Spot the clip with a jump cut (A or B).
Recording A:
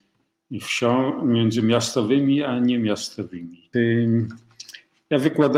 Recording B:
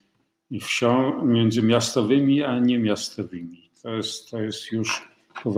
A